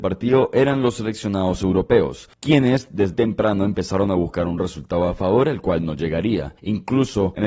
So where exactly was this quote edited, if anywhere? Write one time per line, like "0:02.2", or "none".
0:03.1